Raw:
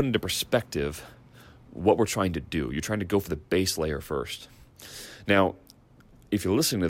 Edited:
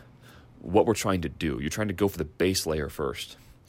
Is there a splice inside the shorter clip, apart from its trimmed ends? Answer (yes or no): no